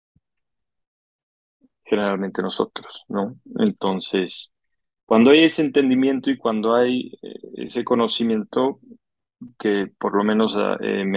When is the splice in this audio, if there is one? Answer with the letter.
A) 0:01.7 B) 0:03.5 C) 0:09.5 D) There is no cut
D